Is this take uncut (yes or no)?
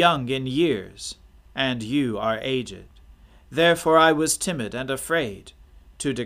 yes